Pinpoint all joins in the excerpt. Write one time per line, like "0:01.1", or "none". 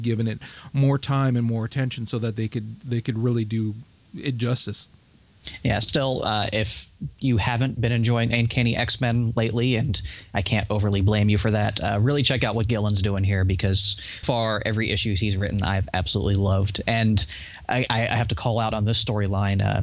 0:14.2